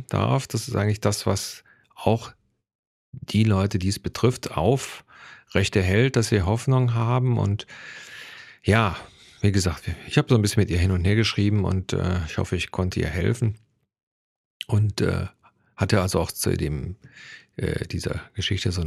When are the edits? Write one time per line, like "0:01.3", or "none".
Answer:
none

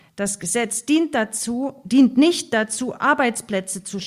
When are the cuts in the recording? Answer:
none

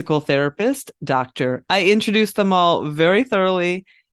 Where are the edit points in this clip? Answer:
0:01.6

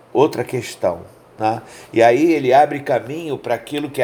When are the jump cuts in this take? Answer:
none

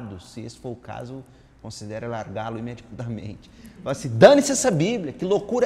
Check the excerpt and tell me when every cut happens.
none

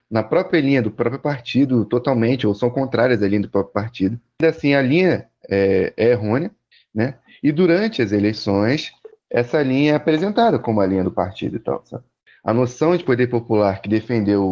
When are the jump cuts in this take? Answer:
none

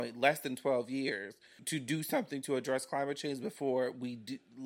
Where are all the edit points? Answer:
0:01.6

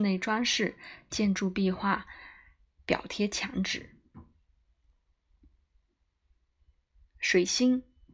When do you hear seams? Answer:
none

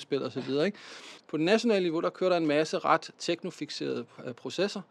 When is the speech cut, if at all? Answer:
0:01.2

